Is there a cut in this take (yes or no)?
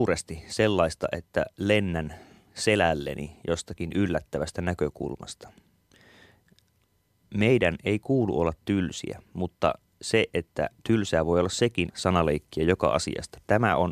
yes